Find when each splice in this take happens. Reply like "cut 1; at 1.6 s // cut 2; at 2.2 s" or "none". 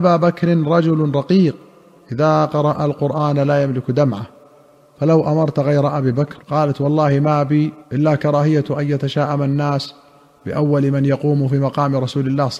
cut 1; at 6.4 s // cut 2; at 7.8 s